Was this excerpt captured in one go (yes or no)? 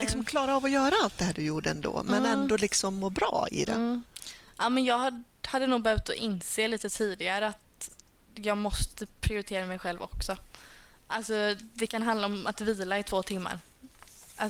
yes